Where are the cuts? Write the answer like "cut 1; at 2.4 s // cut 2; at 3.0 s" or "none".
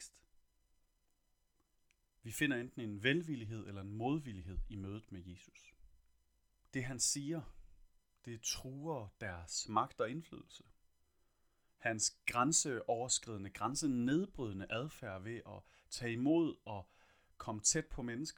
cut 1; at 6.7 s

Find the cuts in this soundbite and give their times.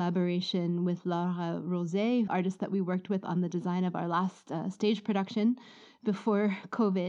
cut 1; at 2.3 s

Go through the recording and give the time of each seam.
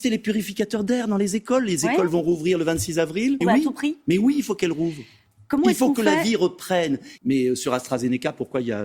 cut 1; at 3.4 s // cut 2; at 7.2 s

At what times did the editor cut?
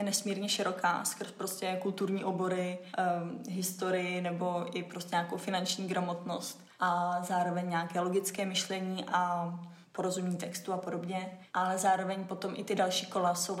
none

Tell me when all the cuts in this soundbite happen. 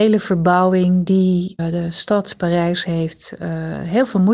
cut 1; at 1.6 s

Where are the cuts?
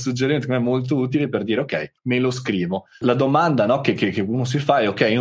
cut 1; at 2.0 s

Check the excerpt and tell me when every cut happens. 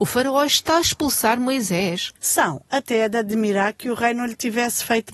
cut 1; at 2.2 s

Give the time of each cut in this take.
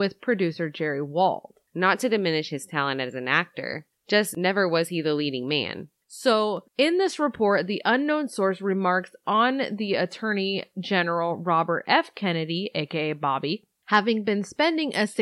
cut 1; at 1.7 s // cut 2; at 6.0 s

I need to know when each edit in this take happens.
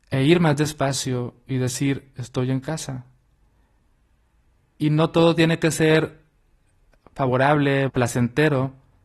cut 1; at 2.1 s // cut 2; at 7.9 s

